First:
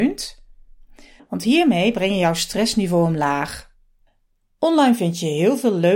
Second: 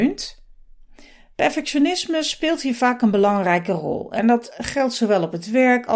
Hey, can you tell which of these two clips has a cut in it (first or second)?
first